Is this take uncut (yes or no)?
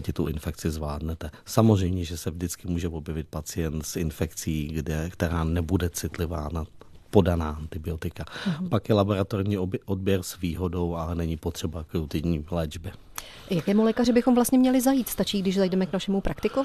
yes